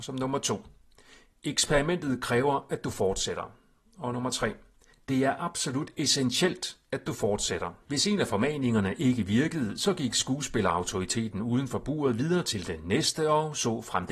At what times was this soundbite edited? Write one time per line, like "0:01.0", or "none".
0:07.8

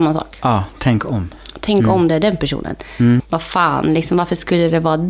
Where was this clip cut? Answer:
0:03.2

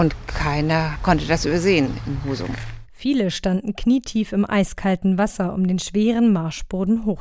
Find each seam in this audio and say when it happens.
0:02.8

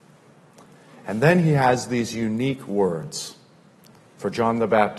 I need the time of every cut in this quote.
none

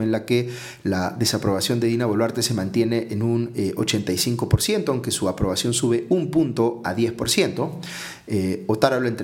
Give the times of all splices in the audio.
none

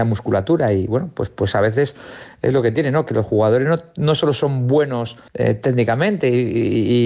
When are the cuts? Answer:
0:05.3

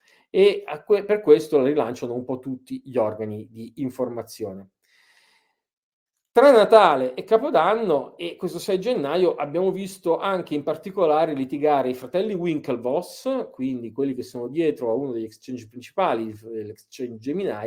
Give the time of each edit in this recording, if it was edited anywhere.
none

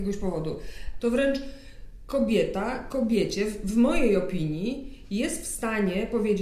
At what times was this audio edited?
0:01.0

